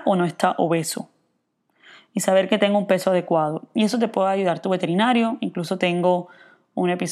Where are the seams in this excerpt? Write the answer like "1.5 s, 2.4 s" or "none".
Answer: none